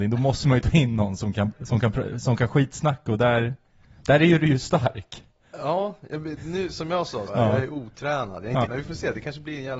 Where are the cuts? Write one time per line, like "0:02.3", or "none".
0:07.3
0:08.6

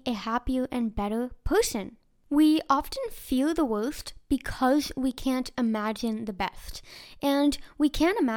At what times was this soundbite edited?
none

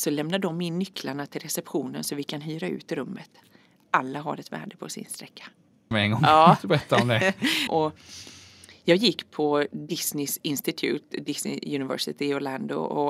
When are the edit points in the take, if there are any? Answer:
0:05.9
0:07.7

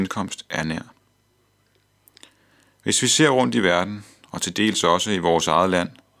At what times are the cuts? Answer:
none

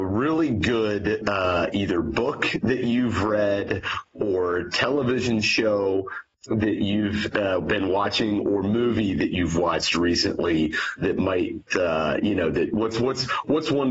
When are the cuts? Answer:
none

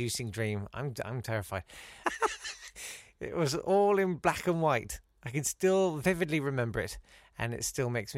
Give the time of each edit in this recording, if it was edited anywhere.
0:02.0

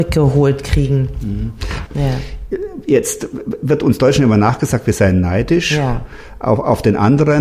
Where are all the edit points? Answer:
0:01.9

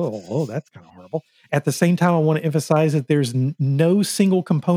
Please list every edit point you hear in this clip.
0:01.5

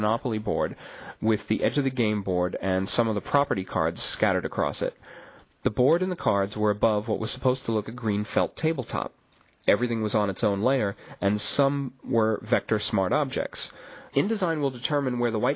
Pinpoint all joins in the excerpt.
0:07.8
0:14.1

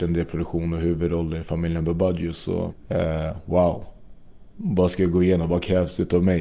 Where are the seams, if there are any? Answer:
0:02.7
0:04.5

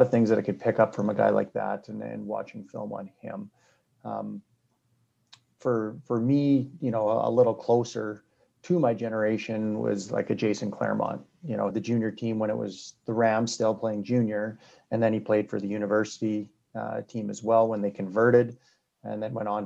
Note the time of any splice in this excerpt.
0:11.7

